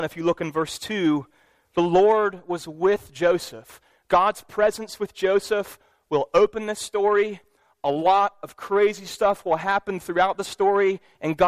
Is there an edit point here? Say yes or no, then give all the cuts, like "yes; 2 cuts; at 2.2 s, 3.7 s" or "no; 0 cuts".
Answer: no; 0 cuts